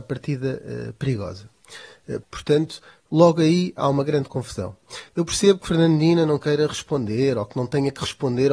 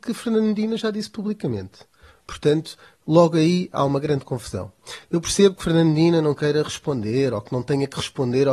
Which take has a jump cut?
first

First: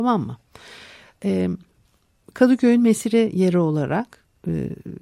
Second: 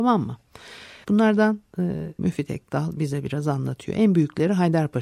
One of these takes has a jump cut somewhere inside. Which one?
second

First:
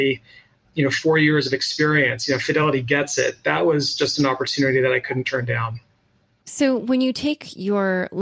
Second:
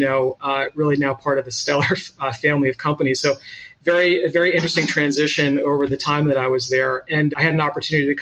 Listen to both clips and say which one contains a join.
second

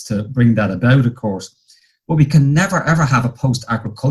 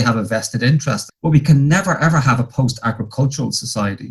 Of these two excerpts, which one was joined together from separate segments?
second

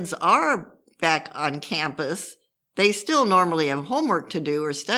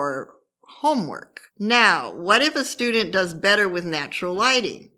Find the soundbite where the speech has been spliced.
second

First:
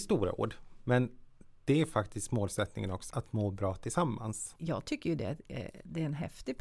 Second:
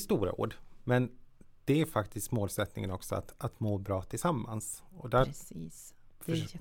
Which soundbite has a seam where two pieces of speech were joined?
first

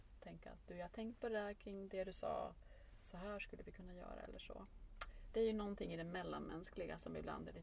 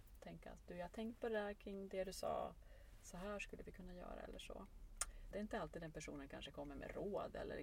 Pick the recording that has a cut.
second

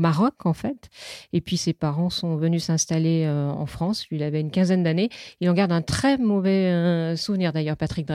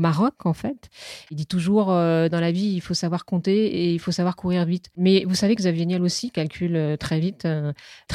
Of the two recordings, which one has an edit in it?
second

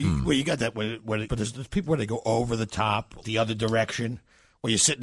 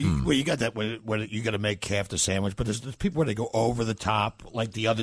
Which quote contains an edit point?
first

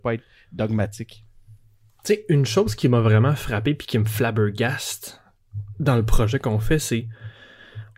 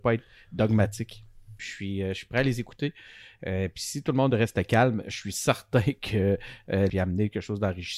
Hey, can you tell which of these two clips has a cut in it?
second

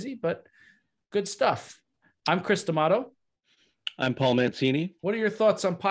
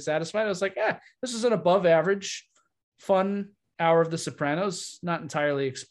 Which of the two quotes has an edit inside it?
first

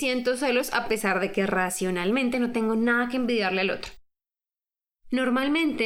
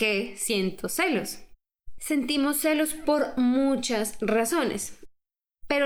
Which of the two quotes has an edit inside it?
second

